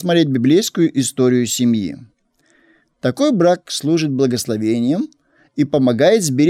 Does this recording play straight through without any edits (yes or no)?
no